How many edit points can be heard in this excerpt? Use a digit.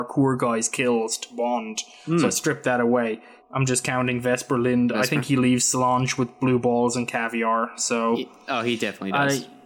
1